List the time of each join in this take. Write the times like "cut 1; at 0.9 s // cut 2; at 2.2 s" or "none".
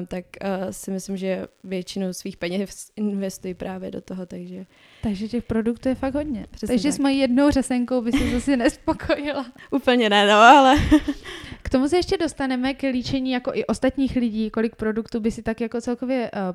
none